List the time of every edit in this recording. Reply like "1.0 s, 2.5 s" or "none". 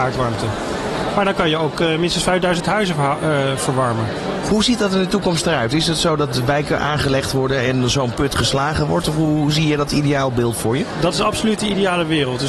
1.1 s